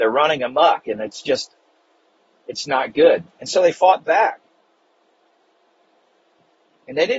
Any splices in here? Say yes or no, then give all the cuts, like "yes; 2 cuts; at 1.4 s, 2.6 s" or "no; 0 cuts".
no; 0 cuts